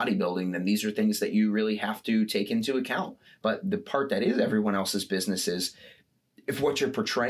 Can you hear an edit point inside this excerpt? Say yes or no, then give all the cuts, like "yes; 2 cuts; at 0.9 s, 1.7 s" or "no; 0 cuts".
yes; 1 cut; at 3.2 s